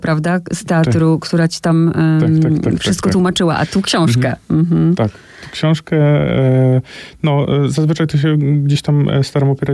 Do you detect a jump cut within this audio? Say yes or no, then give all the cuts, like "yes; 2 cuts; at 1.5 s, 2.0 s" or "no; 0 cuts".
no; 0 cuts